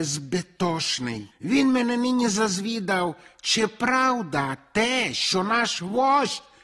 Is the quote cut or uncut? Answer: uncut